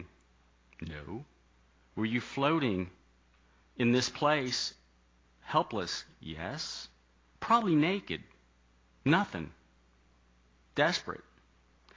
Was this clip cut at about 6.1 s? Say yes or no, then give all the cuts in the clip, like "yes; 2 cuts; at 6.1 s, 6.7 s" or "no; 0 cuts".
no; 0 cuts